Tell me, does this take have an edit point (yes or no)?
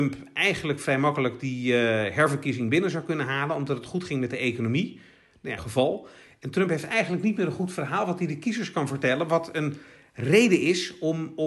yes